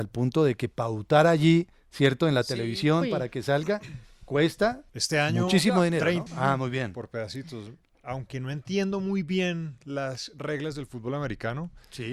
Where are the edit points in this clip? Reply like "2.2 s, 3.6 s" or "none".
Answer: 4.9 s, 6.3 s